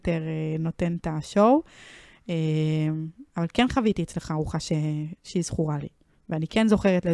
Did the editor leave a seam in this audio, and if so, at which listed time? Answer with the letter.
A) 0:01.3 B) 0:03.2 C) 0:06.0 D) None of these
D